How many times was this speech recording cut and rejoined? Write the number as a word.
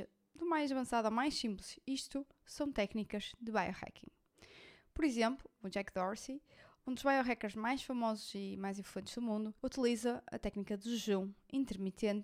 two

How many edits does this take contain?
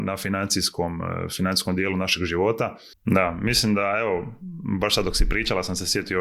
one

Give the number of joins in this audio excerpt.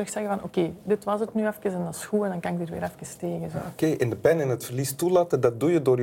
zero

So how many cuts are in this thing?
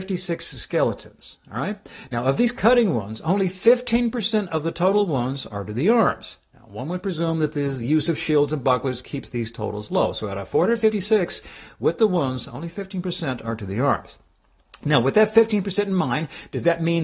zero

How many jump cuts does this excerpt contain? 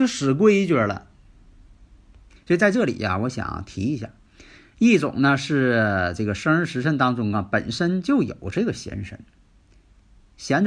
two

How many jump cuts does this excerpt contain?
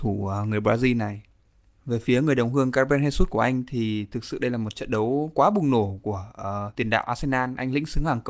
zero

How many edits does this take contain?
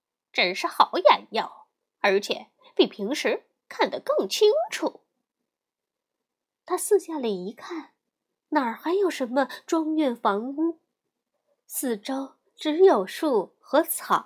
one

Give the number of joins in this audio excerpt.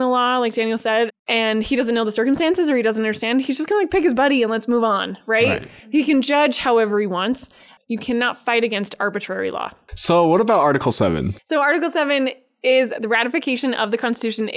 one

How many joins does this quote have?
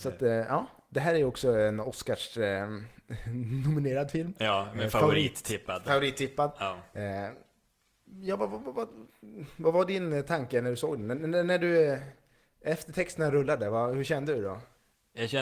zero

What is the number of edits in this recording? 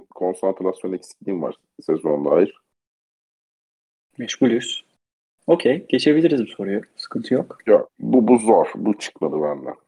zero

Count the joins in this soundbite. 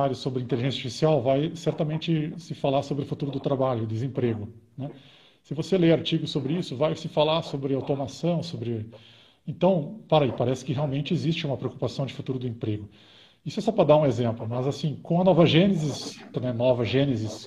one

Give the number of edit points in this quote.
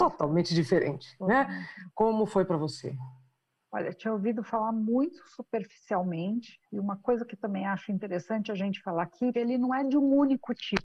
three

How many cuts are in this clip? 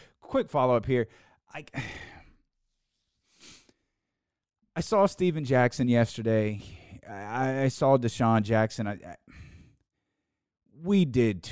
zero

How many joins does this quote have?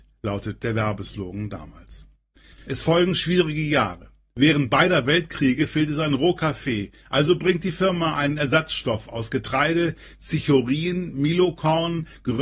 one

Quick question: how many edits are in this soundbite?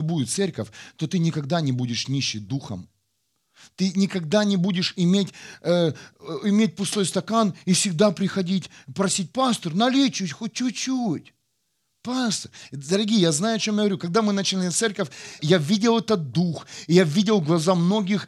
one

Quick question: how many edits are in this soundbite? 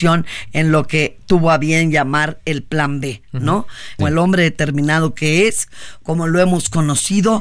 one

